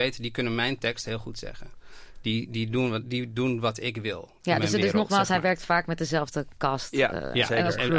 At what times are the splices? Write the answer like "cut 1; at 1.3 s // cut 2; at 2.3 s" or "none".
none